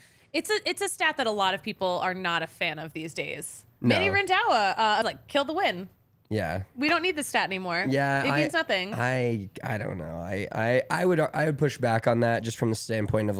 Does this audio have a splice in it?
yes; 1 cut; at 5.0 s

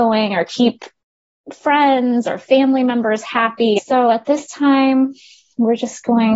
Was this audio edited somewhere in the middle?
yes; 1 cut; at 3.8 s

